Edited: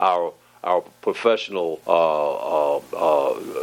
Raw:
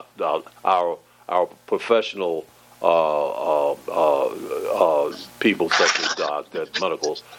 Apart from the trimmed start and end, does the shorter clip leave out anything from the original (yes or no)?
yes